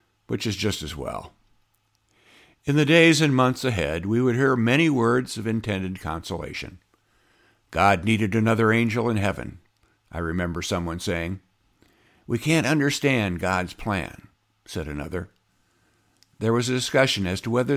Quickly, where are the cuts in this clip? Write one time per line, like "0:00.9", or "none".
none